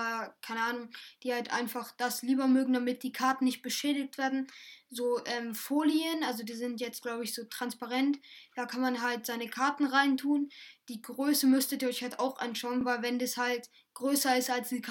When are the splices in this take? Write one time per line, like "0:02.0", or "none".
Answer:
none